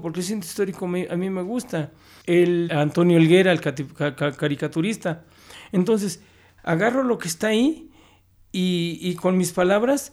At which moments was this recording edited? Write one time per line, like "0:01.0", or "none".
0:02.7
0:06.6